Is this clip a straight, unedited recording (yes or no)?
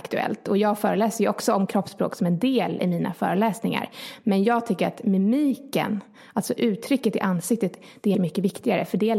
no